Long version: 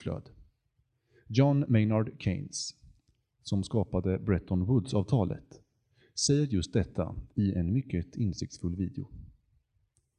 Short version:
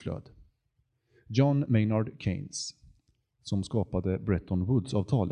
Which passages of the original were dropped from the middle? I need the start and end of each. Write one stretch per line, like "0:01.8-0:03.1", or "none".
none

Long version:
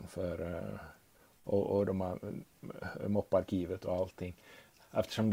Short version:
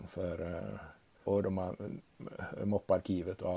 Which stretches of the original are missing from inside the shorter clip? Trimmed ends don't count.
0:01.3-0:01.7

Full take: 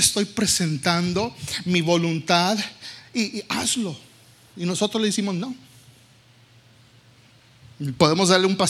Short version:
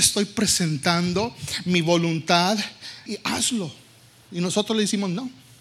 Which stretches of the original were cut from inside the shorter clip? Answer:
0:03.1-0:03.3

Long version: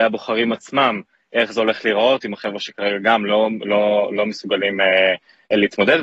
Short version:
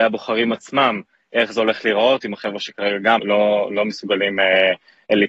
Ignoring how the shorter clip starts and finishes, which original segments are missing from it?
0:03.2-0:03.6

